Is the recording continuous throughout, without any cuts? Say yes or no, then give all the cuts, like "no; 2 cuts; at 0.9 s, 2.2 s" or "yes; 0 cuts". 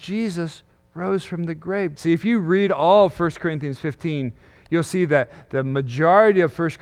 no; 1 cut; at 2.0 s